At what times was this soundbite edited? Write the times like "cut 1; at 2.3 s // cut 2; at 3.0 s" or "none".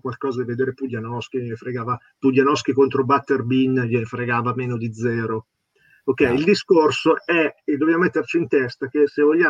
none